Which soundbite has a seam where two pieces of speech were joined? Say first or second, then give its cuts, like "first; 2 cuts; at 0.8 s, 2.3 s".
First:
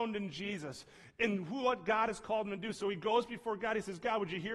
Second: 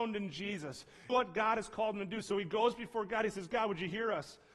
second; 1 cut; at 1.1 s